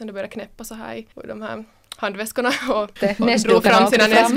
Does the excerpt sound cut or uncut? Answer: cut